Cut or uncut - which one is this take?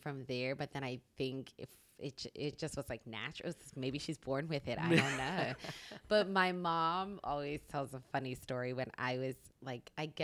uncut